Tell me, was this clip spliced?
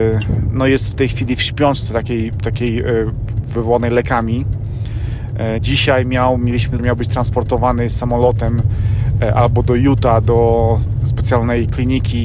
yes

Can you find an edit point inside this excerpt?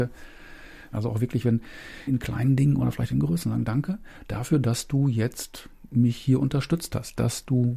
yes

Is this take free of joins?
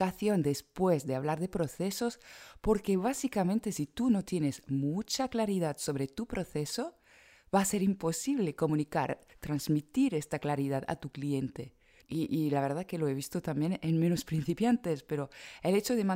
no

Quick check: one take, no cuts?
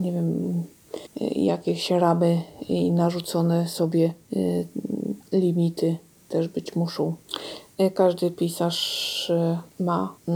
yes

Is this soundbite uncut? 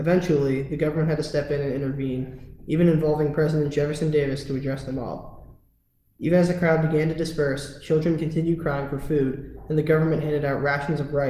yes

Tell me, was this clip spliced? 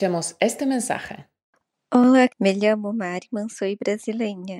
yes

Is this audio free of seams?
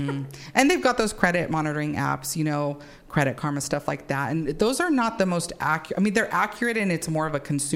yes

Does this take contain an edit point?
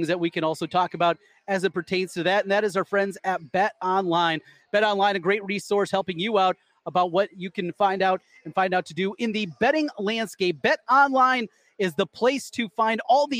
no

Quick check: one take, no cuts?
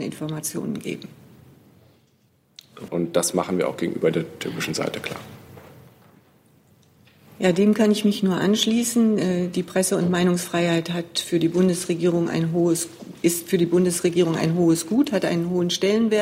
no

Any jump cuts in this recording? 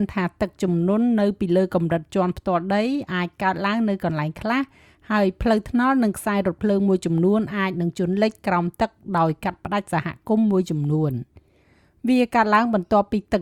no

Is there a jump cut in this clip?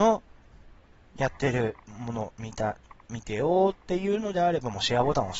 no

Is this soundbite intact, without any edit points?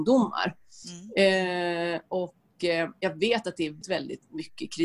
no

